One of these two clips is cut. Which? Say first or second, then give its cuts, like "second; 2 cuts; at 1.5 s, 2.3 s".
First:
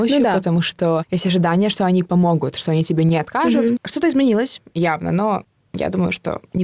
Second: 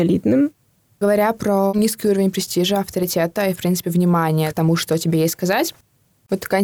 first; 1 cut; at 3.8 s